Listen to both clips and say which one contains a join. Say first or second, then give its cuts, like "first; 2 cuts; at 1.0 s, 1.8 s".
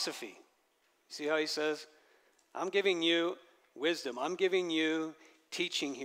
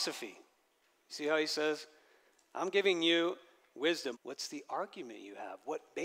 second; 1 cut; at 4.1 s